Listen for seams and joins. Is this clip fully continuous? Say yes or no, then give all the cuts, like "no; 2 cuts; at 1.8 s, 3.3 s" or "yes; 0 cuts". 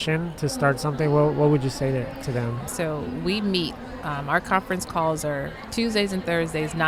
no; 1 cut; at 2.6 s